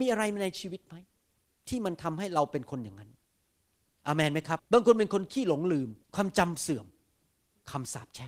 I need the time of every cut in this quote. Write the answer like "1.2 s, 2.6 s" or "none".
4.6 s, 6.0 s